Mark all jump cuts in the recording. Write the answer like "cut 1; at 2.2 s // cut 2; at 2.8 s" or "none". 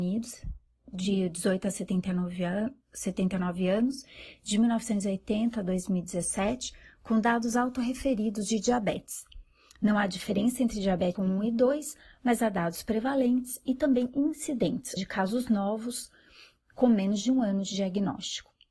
cut 1; at 11.2 s // cut 2; at 15.0 s

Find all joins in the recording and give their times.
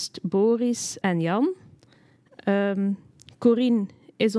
cut 1; at 1.0 s

